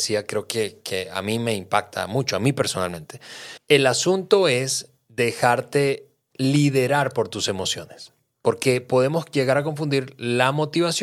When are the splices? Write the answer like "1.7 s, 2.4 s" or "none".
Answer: 3.6 s